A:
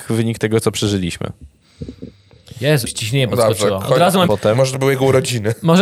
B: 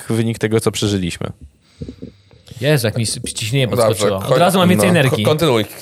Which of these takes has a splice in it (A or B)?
A